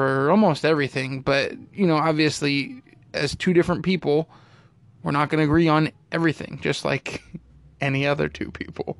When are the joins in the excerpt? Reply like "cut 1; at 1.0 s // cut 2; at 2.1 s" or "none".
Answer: none